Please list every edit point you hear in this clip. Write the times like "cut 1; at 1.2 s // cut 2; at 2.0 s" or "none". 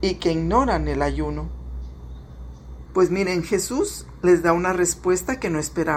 cut 1; at 2.9 s